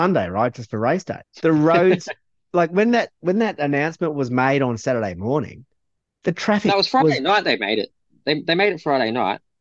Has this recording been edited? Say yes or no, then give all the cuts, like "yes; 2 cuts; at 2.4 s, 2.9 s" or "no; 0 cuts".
yes; 1 cut; at 1.2 s